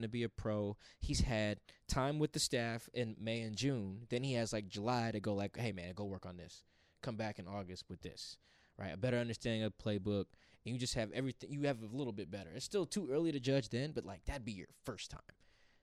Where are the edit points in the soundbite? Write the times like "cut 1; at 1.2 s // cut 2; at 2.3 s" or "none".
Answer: none